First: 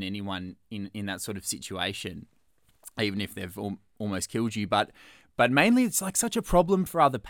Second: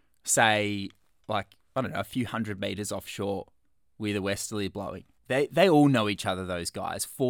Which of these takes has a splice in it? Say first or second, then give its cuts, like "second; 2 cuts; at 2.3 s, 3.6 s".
second; 1 cut; at 5.2 s